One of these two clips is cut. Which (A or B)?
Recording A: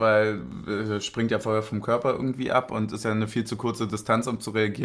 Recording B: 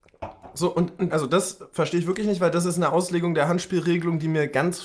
B